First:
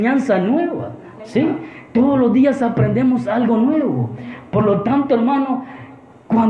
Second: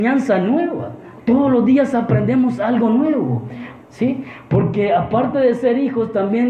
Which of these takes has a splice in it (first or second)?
second